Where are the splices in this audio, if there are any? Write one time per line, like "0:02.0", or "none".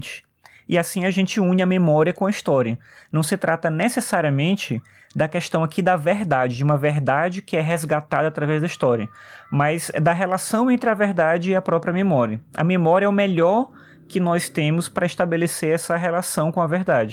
none